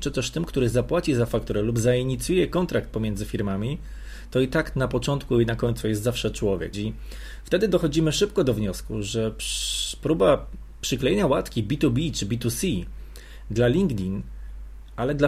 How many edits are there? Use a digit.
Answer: 1